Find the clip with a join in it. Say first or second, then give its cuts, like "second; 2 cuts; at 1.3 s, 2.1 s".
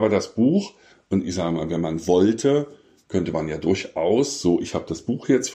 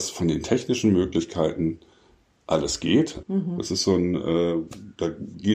second; 1 cut; at 3.2 s